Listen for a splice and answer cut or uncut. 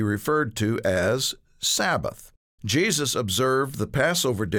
cut